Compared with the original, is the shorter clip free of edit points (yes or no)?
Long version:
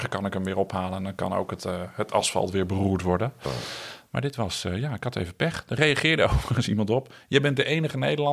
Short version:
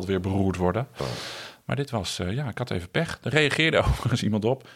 yes